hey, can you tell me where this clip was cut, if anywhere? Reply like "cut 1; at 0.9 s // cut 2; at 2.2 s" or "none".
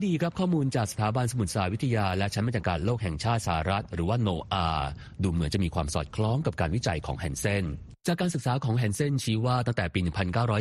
cut 1; at 8.0 s